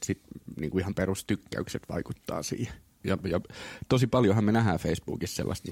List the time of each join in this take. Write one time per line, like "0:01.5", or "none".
0:02.9